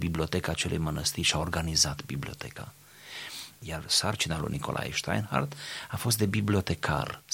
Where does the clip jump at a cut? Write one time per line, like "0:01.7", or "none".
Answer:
0:03.6

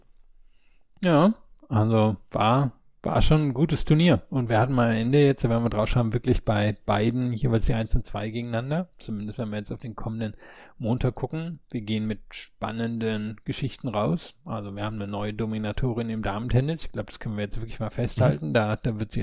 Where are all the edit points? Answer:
none

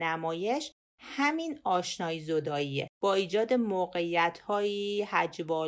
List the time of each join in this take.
0:02.9

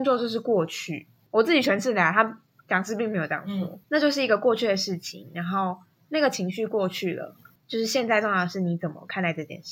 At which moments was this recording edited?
0:03.8

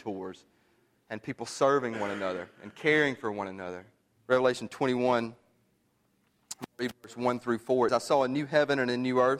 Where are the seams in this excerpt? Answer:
0:04.2
0:07.9

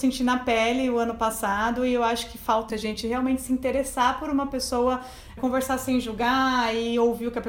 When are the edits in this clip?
0:02.7
0:05.4

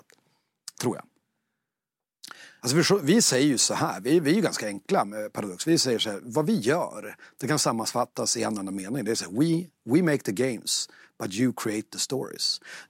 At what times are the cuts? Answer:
0:02.6

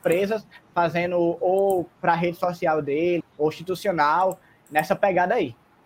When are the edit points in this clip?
0:03.2

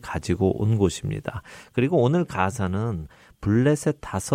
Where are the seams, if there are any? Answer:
none

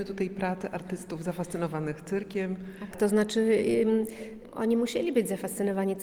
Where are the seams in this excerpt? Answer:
0:02.9

